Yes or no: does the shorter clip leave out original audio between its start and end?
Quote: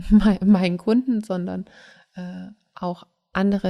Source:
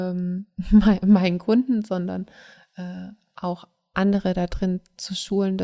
no